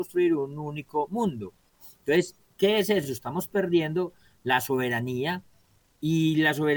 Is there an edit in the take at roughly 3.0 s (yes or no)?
no